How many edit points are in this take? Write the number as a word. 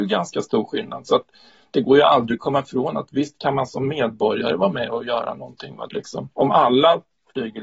one